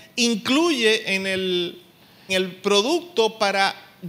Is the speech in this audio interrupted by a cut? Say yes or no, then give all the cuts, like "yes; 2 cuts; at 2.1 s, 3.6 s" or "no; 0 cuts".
yes; 1 cut; at 2.3 s